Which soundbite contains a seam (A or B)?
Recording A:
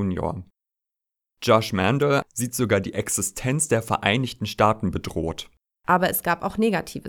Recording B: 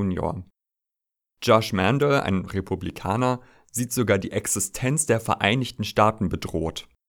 A